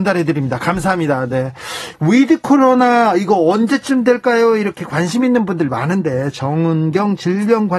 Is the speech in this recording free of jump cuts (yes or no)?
no